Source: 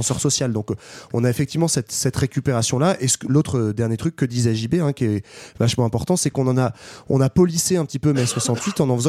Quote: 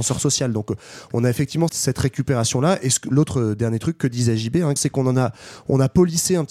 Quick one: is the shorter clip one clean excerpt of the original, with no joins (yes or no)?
no